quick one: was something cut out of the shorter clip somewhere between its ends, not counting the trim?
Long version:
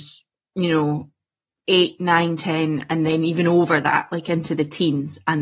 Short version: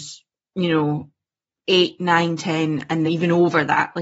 yes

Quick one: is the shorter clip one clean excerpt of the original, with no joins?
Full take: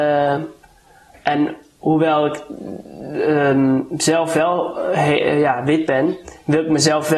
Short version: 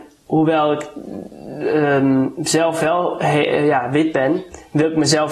no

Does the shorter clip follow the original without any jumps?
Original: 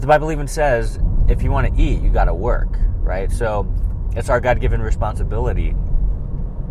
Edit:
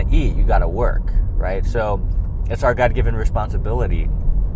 yes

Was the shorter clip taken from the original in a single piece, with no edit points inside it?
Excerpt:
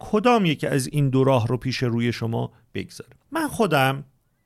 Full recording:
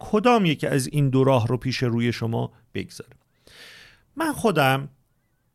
no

